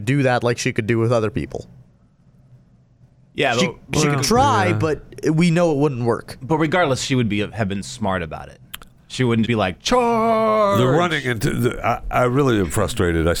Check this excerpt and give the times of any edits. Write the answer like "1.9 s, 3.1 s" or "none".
9.4 s